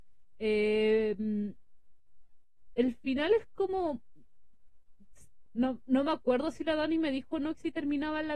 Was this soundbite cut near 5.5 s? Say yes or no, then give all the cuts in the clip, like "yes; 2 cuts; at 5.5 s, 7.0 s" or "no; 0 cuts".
yes; 1 cut; at 5.5 s